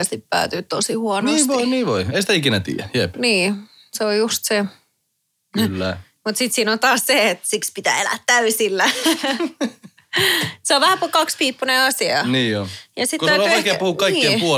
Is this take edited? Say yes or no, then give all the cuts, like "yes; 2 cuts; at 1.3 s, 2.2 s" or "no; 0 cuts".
no; 0 cuts